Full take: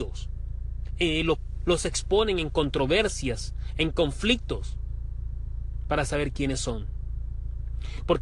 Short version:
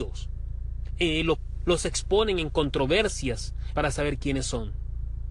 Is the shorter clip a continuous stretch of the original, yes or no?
no